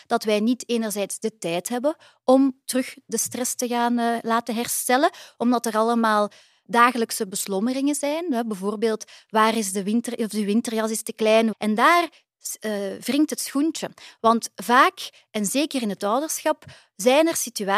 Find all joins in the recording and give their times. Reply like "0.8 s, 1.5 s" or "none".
11.5 s

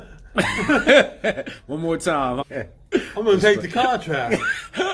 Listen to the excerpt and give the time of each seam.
2.4 s

